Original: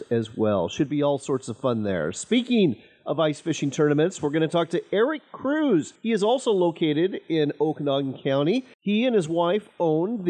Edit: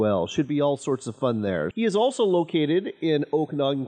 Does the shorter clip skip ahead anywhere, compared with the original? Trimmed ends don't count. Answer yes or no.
yes